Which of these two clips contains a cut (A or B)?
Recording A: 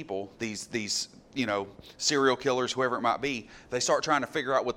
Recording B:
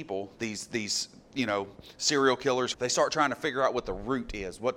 B